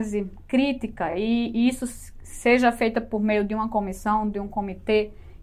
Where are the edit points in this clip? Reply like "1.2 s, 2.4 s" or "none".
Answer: none